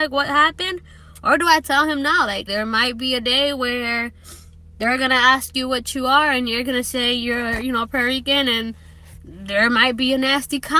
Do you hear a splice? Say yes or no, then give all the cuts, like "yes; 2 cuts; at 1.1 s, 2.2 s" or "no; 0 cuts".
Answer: yes; 1 cut; at 2.5 s